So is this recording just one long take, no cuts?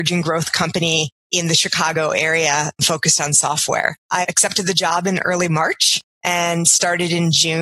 yes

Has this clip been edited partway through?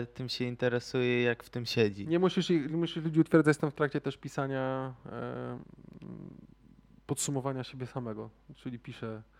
no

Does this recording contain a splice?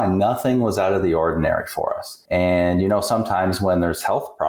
yes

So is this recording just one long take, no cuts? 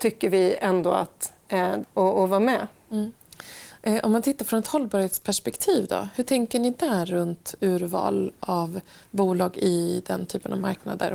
no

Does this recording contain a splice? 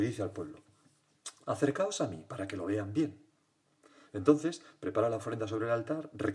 no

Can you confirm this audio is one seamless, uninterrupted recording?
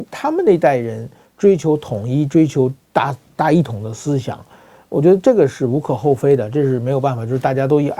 yes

